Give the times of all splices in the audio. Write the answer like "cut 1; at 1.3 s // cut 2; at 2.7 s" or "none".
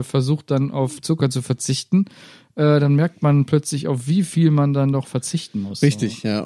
none